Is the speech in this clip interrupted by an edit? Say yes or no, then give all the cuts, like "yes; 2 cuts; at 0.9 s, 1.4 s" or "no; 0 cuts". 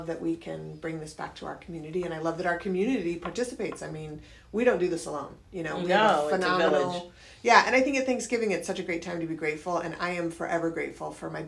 no; 0 cuts